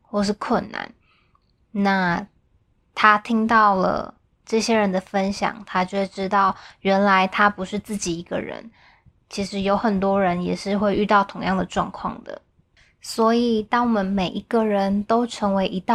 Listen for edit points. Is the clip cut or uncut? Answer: uncut